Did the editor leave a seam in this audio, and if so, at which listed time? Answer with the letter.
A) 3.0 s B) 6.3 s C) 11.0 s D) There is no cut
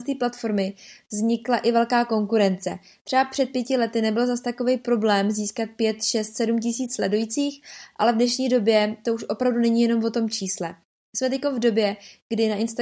D